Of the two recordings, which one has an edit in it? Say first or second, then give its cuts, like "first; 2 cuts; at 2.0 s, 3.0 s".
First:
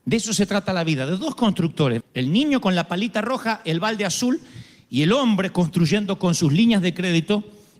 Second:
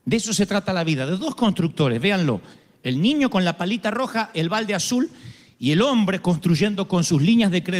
first; 1 cut; at 2.0 s